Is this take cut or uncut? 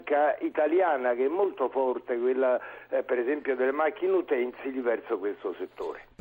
uncut